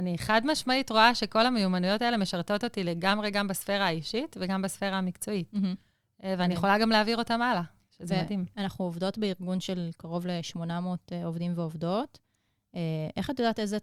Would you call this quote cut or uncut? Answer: uncut